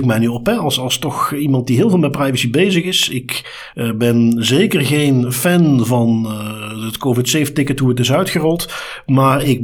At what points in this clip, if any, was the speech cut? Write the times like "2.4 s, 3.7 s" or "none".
none